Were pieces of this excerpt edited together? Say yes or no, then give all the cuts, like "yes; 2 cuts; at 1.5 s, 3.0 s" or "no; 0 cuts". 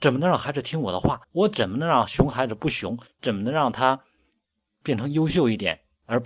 yes; 2 cuts; at 1.2 s, 3.1 s